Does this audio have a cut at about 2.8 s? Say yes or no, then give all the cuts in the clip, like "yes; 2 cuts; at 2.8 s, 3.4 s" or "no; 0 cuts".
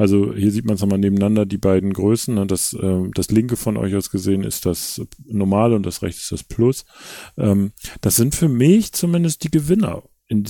no; 0 cuts